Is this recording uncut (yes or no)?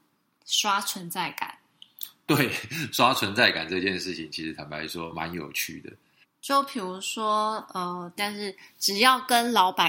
no